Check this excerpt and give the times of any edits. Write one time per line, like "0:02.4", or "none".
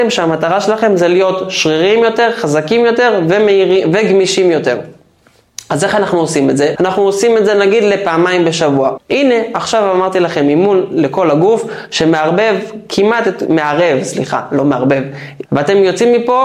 0:06.7
0:09.0
0:15.5